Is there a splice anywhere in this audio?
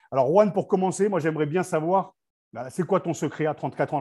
no; 0 cuts

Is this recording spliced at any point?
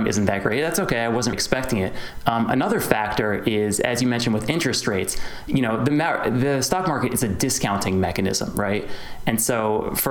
yes; 1 cut; at 1.3 s

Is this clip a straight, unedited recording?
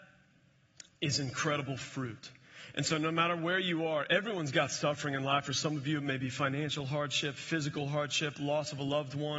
no; 1 cut; at 5.4 s

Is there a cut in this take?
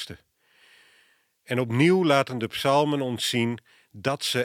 no; 0 cuts

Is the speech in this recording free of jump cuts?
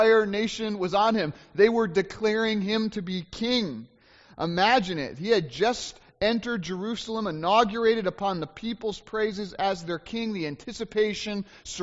yes; 0 cuts

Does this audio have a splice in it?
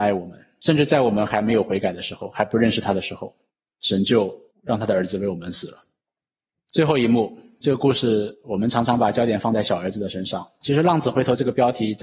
no; 0 cuts

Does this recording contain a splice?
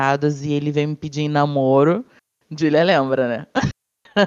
no; 0 cuts

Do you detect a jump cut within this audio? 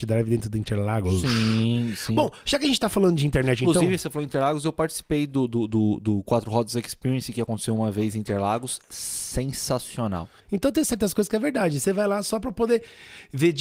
yes; 1 cut; at 10.4 s

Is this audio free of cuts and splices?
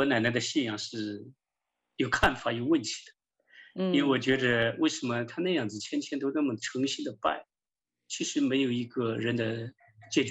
yes; 0 cuts

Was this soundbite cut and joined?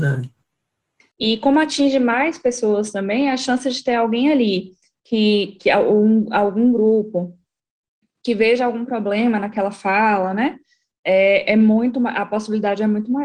yes; 1 cut; at 1.1 s

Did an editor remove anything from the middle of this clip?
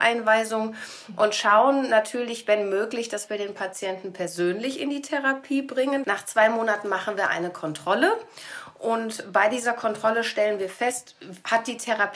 yes; 1 cut; at 6.0 s

